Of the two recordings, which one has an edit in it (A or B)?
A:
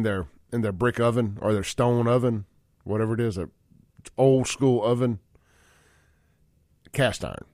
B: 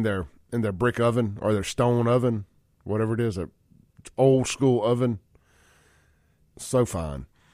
B